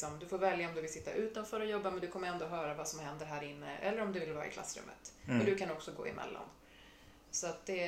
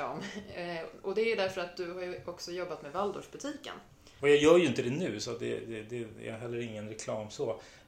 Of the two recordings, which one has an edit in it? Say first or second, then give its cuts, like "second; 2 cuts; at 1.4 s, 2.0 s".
second; 1 cut; at 4.2 s